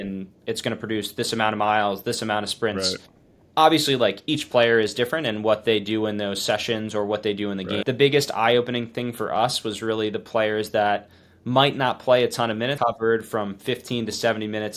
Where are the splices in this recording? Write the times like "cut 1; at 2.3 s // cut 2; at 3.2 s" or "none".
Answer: cut 1; at 7.8 s // cut 2; at 12.8 s